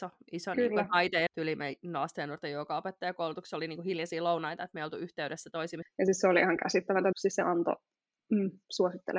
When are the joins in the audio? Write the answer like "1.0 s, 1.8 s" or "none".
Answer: 1.3 s, 5.8 s, 7.1 s